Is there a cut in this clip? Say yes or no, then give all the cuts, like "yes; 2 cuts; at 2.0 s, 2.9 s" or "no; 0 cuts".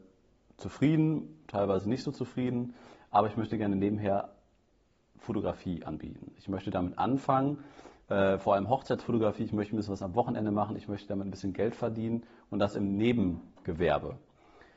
no; 0 cuts